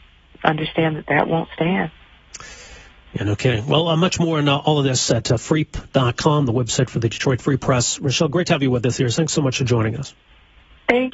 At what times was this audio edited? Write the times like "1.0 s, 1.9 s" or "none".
none